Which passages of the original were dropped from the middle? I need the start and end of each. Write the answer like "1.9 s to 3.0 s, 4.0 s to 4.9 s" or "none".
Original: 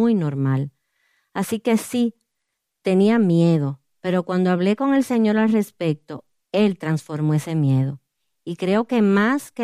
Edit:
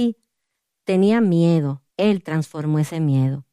3.9 s to 6.4 s

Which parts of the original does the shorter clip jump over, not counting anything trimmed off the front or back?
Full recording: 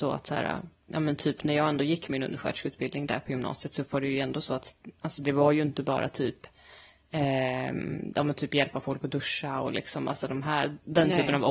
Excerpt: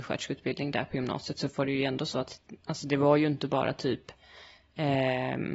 none

